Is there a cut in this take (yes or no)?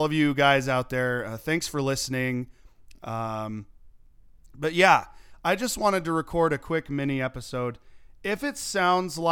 no